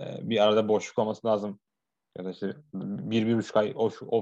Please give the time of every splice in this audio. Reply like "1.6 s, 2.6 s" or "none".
none